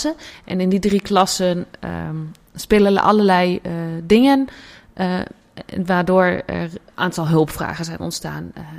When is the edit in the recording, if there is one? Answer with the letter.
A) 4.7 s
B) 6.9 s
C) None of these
B